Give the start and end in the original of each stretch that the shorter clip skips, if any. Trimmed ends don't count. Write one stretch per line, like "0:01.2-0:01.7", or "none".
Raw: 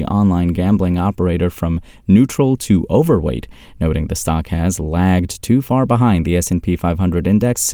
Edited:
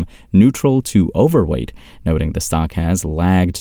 none